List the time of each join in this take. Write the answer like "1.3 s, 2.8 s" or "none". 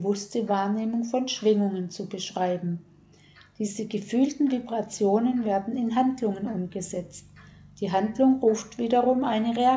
none